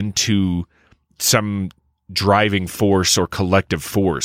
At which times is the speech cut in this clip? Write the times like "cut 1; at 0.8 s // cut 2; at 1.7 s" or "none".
none